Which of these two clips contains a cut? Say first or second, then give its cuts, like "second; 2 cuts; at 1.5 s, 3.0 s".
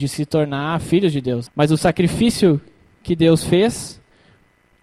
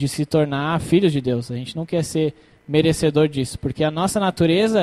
first; 1 cut; at 1.5 s